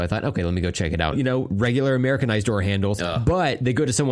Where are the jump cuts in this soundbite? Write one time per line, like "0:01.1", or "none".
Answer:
0:01.1